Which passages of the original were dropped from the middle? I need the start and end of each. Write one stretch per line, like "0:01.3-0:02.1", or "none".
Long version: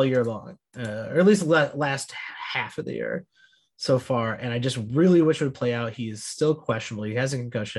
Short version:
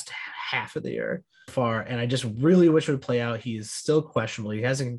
0:03.5-0:04.0